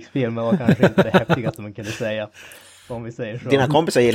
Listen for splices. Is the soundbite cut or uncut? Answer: uncut